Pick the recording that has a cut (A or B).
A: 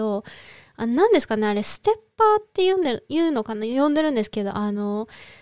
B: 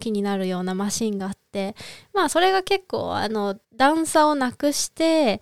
B